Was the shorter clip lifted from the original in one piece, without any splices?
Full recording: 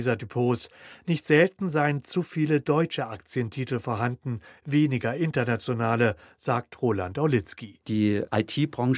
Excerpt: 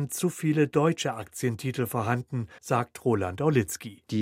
no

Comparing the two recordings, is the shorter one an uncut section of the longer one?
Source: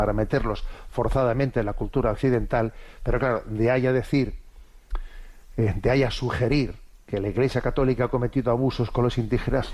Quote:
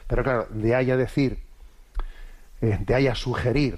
yes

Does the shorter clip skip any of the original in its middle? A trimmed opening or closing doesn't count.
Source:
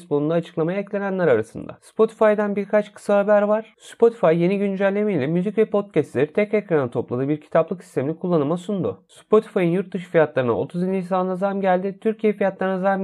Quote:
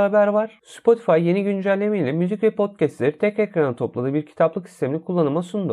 no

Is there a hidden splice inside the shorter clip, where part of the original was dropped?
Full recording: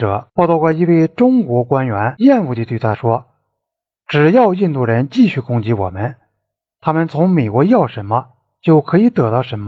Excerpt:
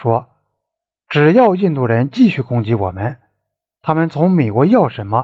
no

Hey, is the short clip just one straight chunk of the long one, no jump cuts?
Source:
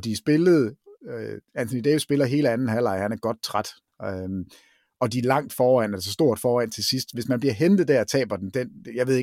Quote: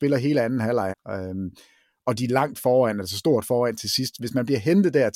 no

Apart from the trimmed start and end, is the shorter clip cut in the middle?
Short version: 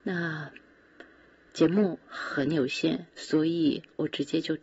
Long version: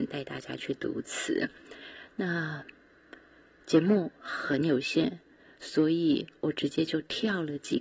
yes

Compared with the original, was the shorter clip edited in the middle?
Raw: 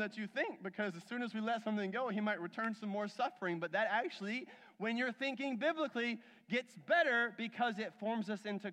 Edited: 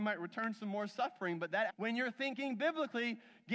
yes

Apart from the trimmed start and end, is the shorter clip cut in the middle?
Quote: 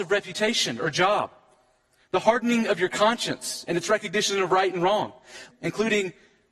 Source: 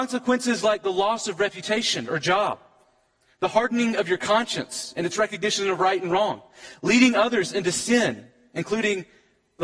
yes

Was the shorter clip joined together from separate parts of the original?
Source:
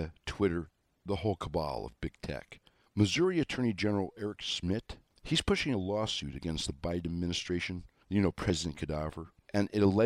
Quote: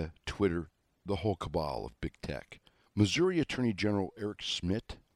no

